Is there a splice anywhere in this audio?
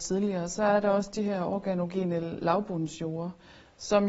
no; 0 cuts

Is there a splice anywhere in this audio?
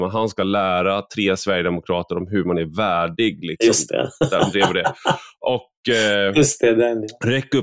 no; 0 cuts

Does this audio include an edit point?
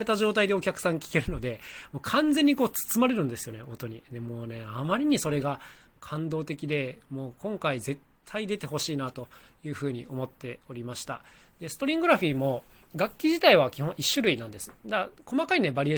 no; 0 cuts

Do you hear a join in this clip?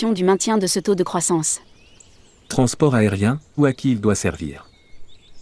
yes; 1 cut; at 3.6 s

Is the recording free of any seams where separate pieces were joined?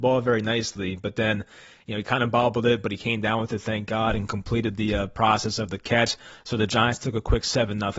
yes; 0 cuts

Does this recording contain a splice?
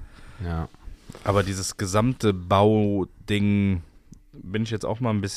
no; 0 cuts

